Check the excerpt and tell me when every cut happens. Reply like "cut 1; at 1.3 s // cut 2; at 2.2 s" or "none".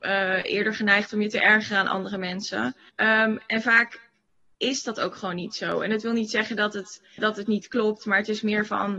cut 1; at 2.9 s // cut 2; at 7.2 s